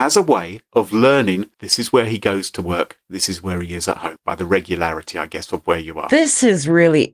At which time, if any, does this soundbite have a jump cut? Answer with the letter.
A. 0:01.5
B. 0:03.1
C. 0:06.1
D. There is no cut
A